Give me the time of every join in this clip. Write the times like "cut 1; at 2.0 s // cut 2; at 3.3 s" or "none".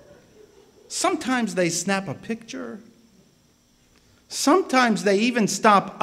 none